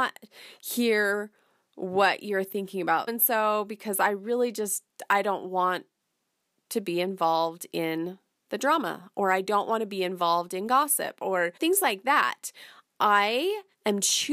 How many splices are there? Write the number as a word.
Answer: two